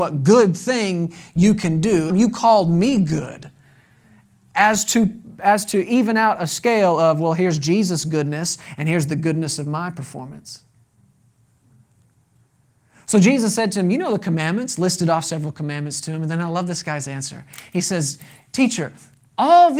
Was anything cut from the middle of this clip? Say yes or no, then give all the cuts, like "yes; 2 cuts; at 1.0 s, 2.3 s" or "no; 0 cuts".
yes; 1 cut; at 2.1 s